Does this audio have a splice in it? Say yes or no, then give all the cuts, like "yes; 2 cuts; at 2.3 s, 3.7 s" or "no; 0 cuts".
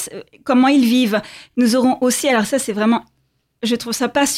no; 0 cuts